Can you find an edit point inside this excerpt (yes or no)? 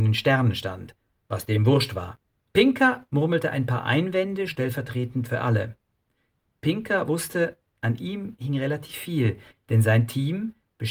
yes